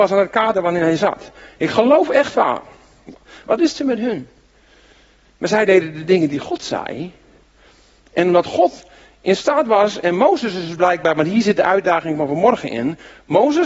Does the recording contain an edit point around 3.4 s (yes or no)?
yes